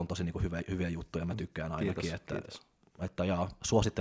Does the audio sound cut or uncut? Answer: uncut